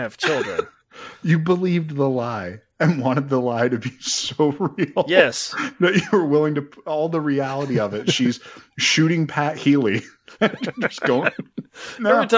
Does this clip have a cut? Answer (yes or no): no